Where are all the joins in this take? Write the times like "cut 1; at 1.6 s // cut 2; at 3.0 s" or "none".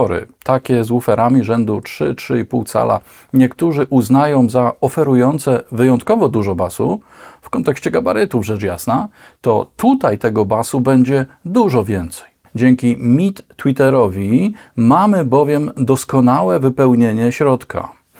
cut 1; at 12.5 s